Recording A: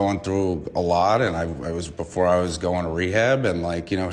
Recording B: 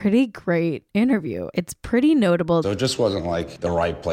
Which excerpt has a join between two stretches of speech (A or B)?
B